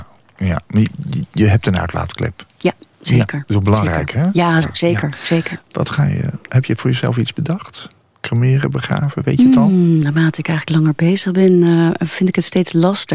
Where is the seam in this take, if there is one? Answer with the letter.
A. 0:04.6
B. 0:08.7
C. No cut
A